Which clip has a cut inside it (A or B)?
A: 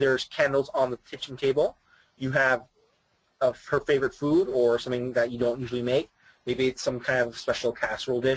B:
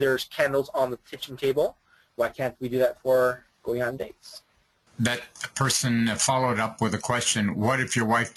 B